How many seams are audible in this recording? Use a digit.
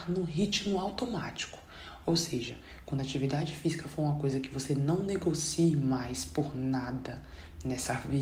0